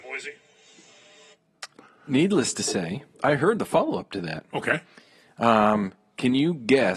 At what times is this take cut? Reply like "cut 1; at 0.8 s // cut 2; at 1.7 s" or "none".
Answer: cut 1; at 3.1 s